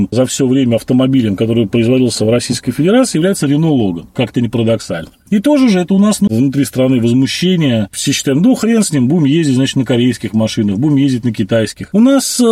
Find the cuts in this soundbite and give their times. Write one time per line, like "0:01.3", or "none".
0:06.3